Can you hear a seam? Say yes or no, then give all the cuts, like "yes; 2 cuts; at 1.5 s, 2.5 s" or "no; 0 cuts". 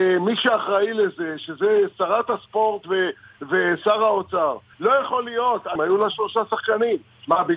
yes; 2 cuts; at 4.7 s, 5.8 s